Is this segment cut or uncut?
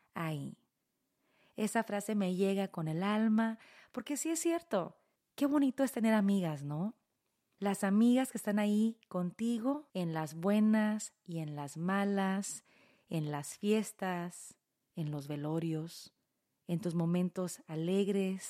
cut